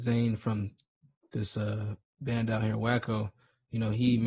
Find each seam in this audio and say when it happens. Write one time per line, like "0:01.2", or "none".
none